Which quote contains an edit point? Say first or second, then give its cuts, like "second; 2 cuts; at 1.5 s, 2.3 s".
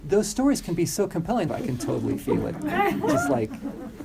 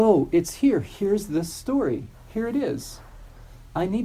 first; 1 cut; at 1.5 s